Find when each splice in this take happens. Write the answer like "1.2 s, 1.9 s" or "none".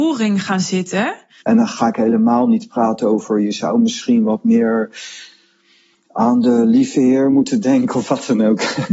1.4 s